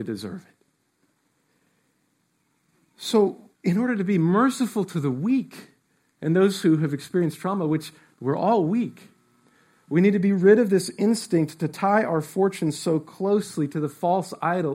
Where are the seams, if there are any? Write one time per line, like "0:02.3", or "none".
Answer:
0:03.5

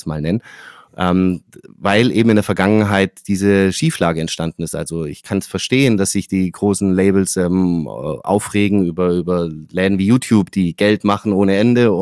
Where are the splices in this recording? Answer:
none

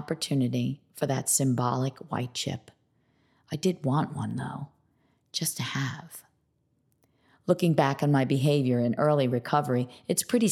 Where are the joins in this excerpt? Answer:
none

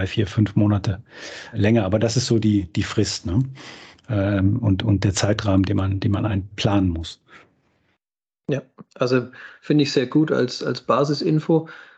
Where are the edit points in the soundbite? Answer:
0:01.5
0:06.5

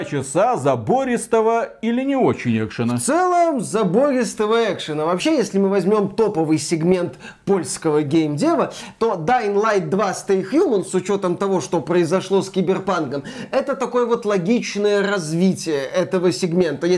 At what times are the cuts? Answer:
none

